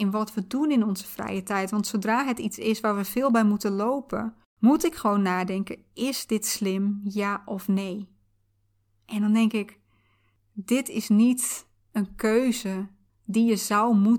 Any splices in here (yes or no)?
no